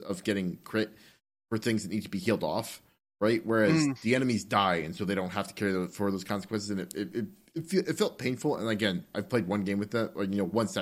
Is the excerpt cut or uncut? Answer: uncut